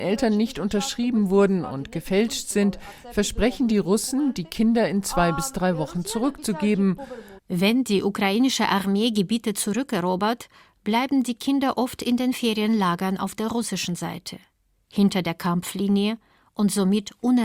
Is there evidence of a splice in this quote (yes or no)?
yes